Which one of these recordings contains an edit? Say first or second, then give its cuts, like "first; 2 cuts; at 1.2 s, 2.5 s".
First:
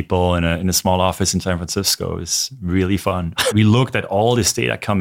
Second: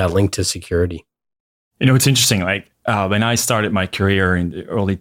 first; 1 cut; at 3.5 s